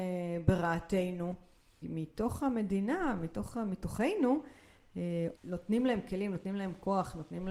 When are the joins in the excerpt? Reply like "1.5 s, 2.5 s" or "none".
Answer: 1.8 s, 5.4 s